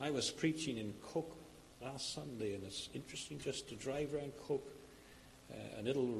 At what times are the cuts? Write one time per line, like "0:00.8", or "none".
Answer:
none